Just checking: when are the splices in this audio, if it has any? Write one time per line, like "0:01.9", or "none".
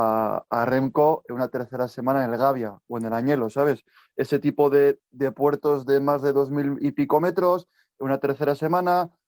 none